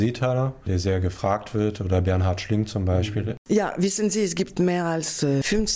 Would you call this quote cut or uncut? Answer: uncut